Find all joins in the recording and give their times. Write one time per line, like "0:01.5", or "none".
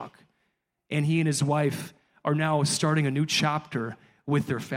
none